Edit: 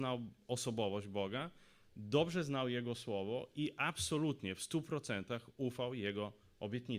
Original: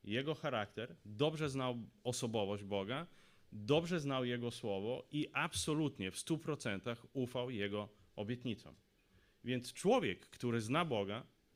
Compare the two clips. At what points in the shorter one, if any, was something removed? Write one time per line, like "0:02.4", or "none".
none